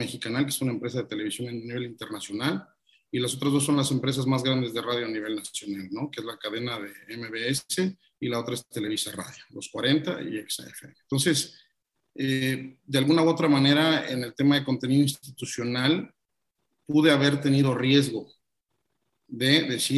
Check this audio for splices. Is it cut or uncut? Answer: uncut